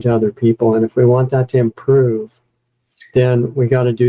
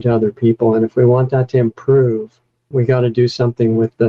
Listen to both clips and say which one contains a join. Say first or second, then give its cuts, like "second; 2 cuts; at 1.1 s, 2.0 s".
second; 1 cut; at 2.7 s